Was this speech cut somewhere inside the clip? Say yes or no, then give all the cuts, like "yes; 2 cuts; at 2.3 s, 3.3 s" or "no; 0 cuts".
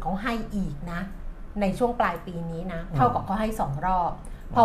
no; 0 cuts